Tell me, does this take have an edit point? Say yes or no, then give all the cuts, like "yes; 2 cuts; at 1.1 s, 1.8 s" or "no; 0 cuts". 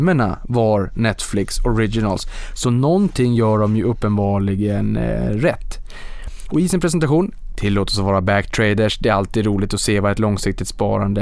no; 0 cuts